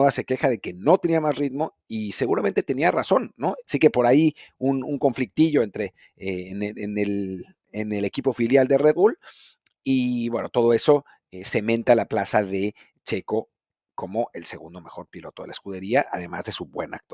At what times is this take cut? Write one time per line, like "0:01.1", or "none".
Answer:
0:03.6